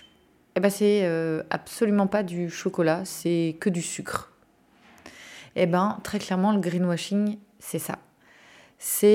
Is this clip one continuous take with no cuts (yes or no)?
yes